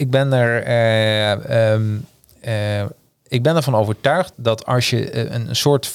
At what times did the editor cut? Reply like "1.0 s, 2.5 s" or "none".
4.3 s

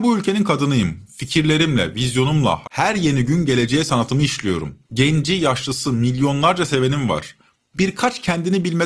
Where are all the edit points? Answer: 2.6 s

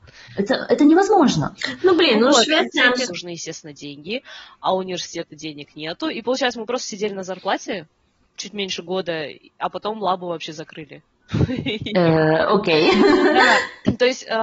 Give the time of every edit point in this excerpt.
3.1 s

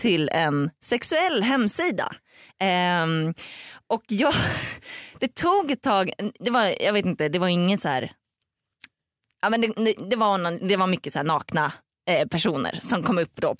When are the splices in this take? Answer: none

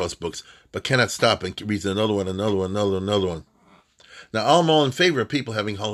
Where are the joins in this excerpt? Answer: none

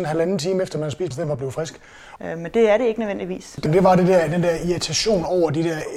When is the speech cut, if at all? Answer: 1.1 s, 2.2 s, 3.7 s

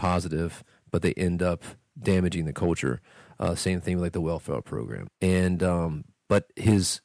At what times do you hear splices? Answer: 5.1 s

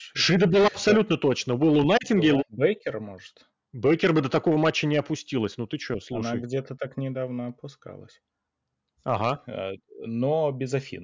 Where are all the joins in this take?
2.4 s, 9.0 s

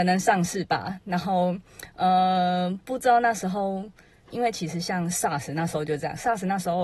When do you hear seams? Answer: 4.3 s

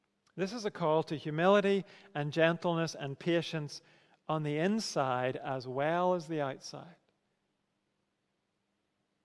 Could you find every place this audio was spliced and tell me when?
none

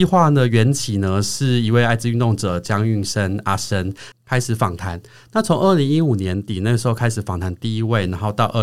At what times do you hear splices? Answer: 4.1 s

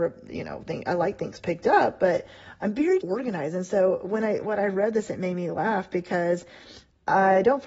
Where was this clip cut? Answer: 3.0 s

